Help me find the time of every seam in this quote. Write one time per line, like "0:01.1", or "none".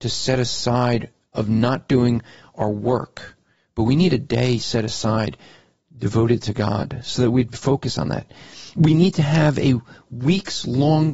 none